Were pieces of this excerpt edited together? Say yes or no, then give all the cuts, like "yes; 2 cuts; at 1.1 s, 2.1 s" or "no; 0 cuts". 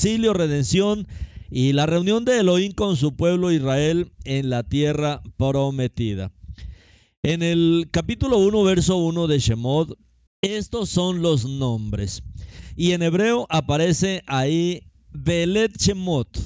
yes; 1 cut; at 10.3 s